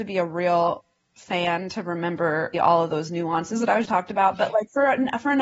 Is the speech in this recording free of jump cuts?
no; 2 cuts; at 2.5 s, 3.9 s

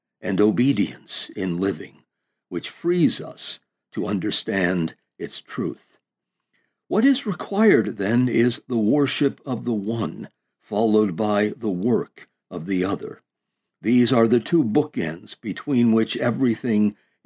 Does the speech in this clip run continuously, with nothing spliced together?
yes; 0 cuts

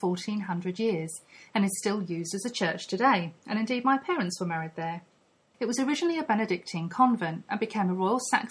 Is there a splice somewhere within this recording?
yes; 1 cut; at 5.5 s

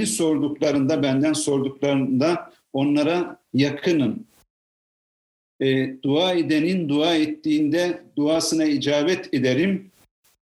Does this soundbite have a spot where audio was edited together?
no; 0 cuts

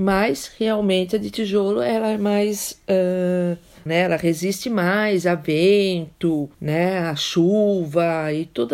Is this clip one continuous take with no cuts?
no; 2 cuts; at 3.9 s, 6.5 s

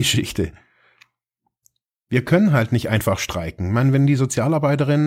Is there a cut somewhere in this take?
no; 0 cuts

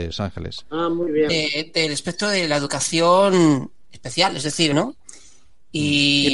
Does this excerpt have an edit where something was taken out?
yes; 2 cuts; at 1.3 s, 4.7 s

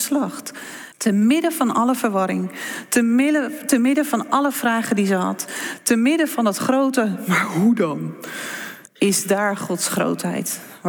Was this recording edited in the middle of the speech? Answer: yes; 2 cuts; at 0.9 s, 8.9 s

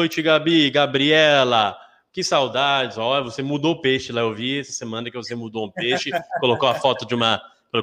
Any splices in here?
no; 0 cuts

